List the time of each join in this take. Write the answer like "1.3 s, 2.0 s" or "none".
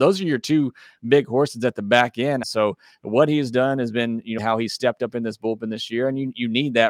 2.4 s, 4.4 s